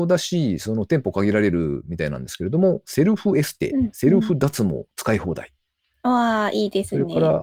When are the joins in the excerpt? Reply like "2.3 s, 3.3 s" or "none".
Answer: none